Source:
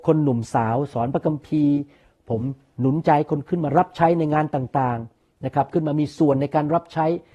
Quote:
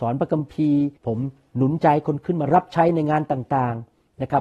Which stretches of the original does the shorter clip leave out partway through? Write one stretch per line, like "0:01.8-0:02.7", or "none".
0:01.9-0:02.2